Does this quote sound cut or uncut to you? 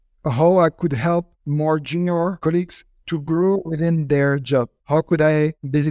uncut